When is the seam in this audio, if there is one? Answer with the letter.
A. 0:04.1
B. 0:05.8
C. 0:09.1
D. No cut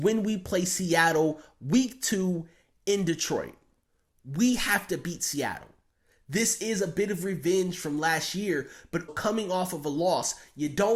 C